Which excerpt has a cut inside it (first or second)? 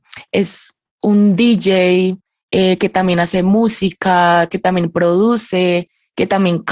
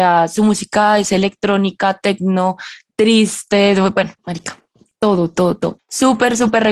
second